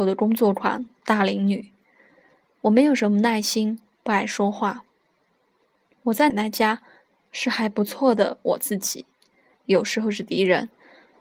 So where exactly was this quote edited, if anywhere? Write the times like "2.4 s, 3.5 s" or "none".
6.3 s, 9.5 s

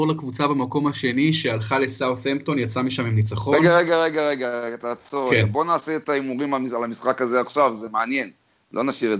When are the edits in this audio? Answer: none

